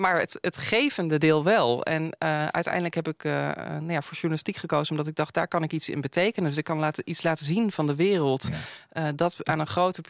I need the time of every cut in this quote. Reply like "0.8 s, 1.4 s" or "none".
none